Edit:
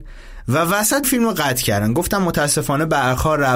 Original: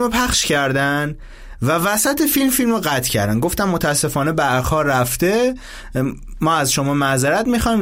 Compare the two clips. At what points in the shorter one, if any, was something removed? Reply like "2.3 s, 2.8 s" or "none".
1.0 s